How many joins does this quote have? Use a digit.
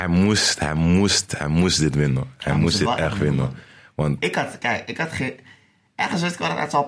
0